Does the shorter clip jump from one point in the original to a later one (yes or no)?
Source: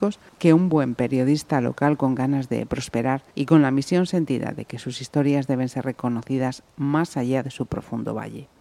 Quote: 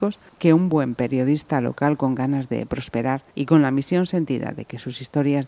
no